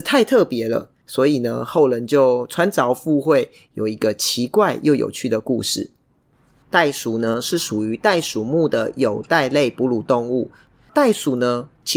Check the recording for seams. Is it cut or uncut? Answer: uncut